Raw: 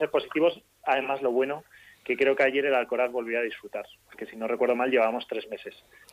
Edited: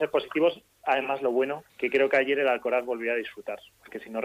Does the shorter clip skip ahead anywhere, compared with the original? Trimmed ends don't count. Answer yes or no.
yes